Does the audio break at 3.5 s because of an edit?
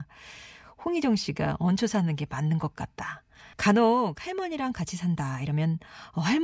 yes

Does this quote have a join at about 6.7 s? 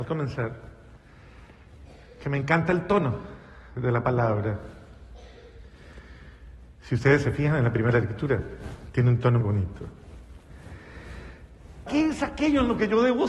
no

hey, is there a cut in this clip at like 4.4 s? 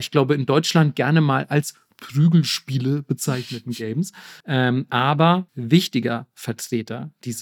yes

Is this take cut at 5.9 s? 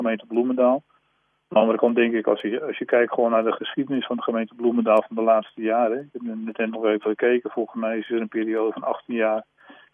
no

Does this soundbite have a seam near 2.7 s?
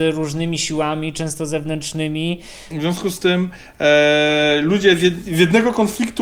yes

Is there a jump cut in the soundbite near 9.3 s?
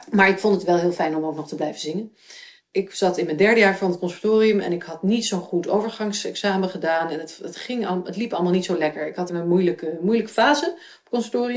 yes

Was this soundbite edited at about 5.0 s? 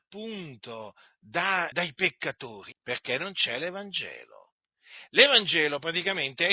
no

